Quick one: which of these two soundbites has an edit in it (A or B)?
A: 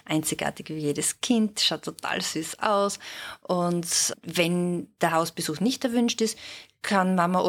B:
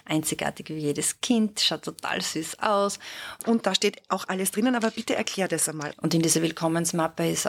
B